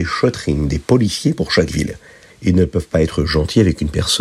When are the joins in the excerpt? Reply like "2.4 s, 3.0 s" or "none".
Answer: 2.3 s